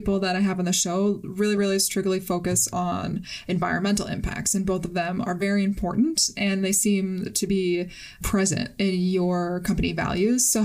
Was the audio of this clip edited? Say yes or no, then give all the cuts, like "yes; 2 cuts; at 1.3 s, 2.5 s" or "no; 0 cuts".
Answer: no; 0 cuts